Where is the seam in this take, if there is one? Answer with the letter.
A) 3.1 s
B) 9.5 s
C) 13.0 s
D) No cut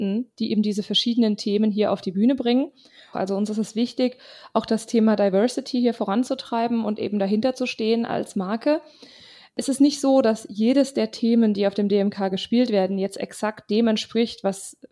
A